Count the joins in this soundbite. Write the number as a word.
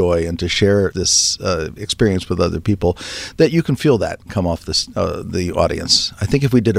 one